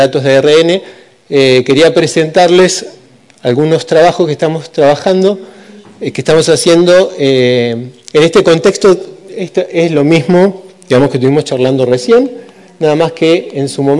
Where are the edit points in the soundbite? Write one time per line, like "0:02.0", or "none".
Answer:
none